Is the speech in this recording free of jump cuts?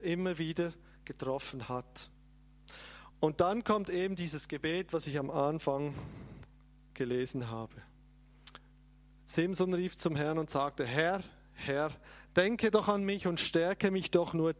no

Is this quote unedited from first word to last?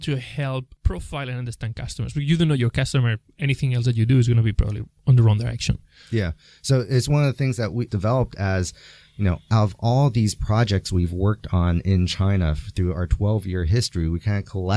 yes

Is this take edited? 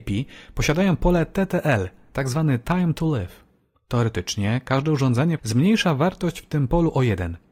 yes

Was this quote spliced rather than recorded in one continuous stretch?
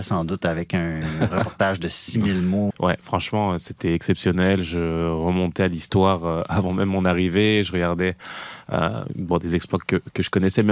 yes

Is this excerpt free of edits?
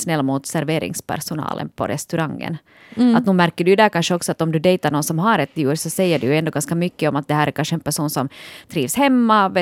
yes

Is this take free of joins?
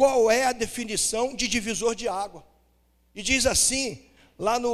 yes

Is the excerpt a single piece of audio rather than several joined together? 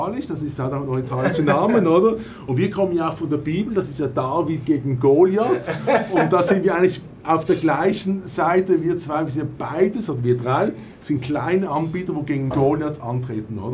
yes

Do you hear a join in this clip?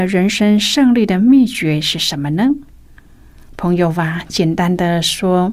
no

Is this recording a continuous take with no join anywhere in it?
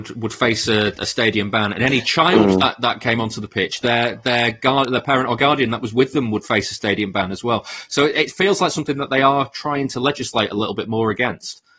yes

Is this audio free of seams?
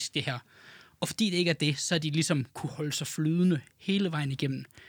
yes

